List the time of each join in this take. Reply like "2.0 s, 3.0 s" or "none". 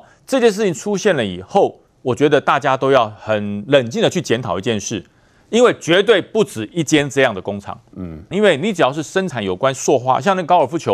8.3 s

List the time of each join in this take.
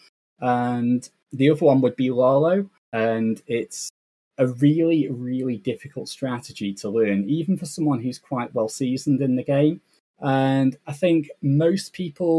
2.8 s, 10.0 s

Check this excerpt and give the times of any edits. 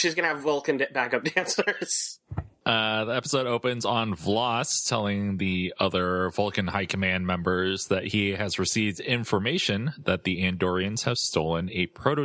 2.6 s

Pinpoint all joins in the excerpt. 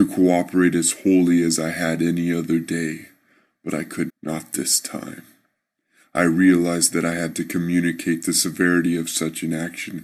4.1 s

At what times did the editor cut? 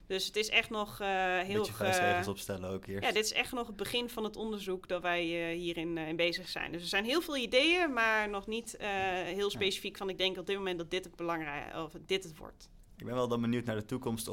none

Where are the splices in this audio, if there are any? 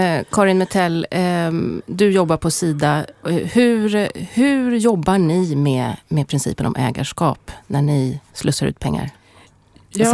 none

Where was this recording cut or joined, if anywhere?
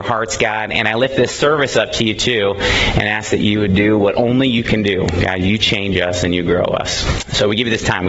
none

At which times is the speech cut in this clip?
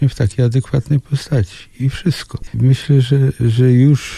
2.5 s

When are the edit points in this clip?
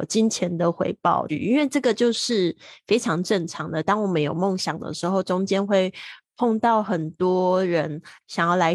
1.3 s

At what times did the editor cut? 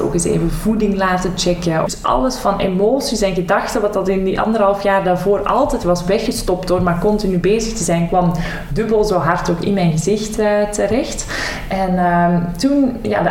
1.9 s

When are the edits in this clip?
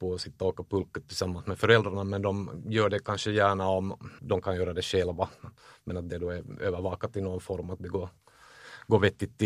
4.2 s

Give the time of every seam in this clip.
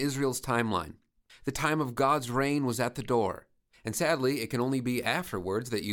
1.3 s, 3.7 s

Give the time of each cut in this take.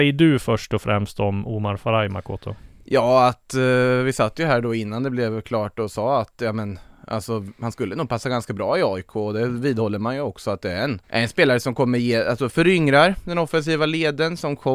11.0 s

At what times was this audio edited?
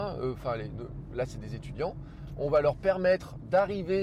none

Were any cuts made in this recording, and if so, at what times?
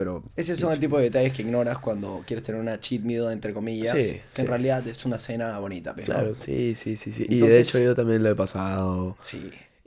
6.4 s

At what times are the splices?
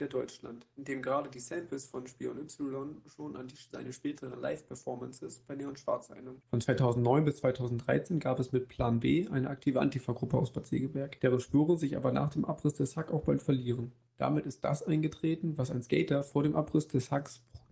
none

